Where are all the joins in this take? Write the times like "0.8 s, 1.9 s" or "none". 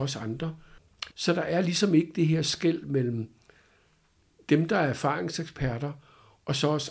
1.1 s